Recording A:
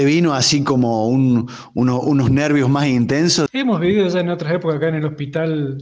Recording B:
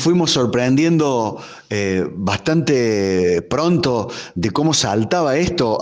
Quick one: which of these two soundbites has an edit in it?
A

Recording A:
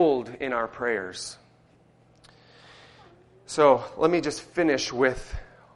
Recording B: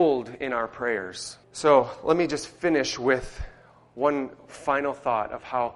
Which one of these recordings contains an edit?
B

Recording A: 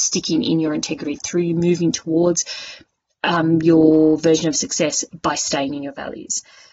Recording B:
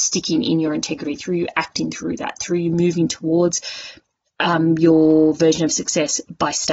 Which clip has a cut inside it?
A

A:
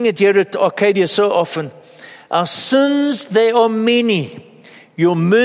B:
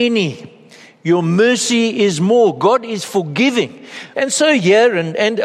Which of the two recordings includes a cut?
B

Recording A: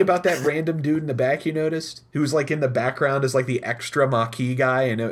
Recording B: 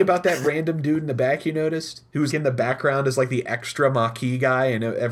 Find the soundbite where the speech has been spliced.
B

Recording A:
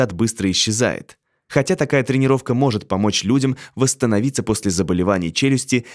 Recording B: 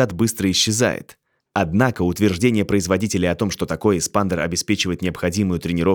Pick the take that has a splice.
B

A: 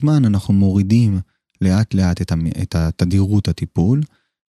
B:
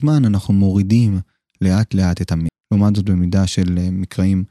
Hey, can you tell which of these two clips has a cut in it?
B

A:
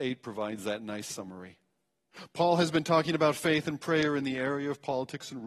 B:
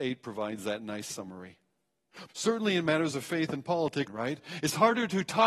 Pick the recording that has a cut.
B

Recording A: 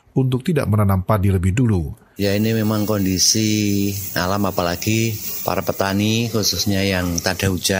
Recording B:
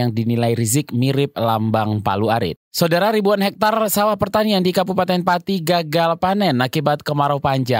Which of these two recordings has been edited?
B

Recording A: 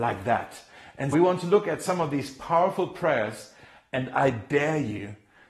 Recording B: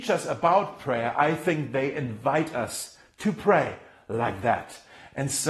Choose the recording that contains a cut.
A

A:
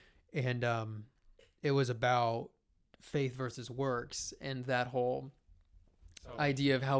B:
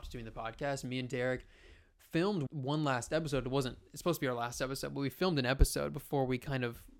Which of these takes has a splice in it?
B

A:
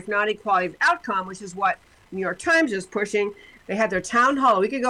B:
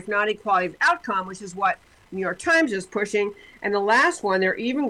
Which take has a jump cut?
A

